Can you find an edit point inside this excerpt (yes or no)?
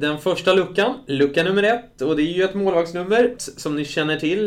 yes